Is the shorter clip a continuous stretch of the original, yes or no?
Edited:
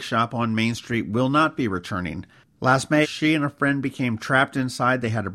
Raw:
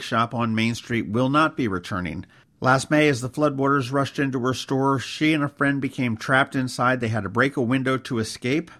no